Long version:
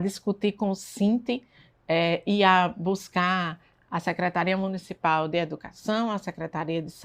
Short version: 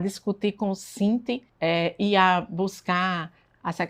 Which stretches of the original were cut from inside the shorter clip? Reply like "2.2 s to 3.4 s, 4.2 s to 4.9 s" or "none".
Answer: 1.5 s to 1.8 s